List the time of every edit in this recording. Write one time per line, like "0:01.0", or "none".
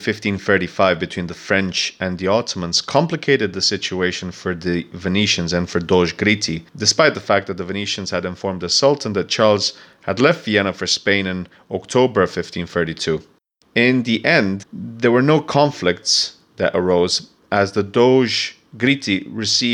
0:06.7
0:13.6
0:14.6